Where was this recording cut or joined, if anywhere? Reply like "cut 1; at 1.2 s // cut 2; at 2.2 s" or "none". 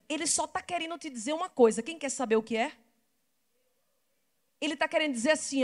none